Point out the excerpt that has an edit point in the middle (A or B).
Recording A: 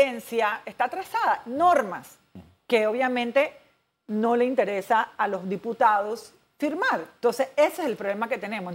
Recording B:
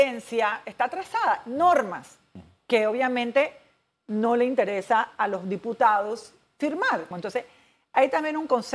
B